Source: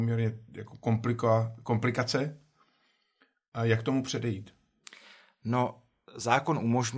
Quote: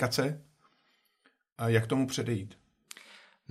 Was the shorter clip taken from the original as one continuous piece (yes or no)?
yes